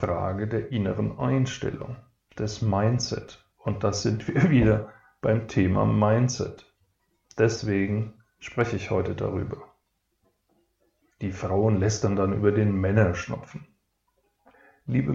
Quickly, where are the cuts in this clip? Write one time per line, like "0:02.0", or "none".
0:11.1

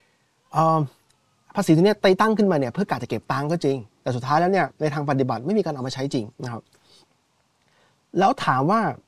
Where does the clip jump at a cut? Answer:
0:03.9
0:06.3

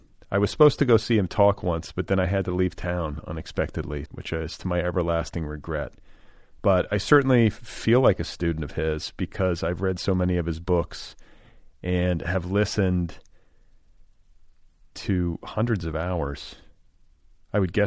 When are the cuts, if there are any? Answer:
0:04.1

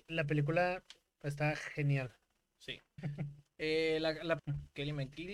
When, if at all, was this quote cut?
0:03.0
0:04.4

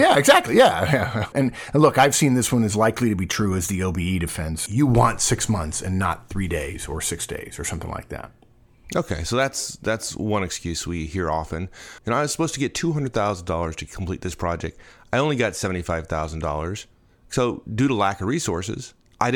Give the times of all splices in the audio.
0:01.3
0:04.7
0:12.0

